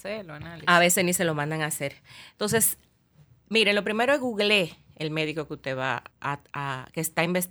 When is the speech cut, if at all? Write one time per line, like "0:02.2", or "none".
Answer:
0:06.1